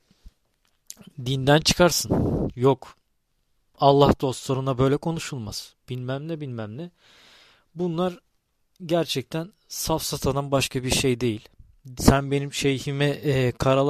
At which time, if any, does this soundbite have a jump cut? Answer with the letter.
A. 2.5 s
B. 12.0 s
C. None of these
B